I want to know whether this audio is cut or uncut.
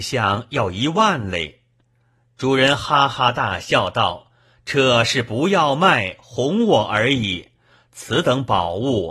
uncut